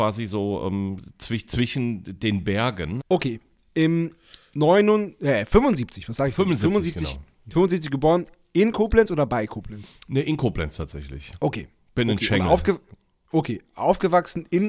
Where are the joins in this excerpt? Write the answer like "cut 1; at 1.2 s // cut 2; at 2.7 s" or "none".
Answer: cut 1; at 3.0 s